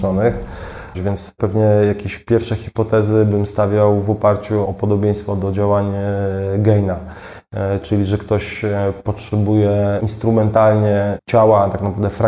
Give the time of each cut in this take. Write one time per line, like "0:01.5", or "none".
0:00.9
0:04.6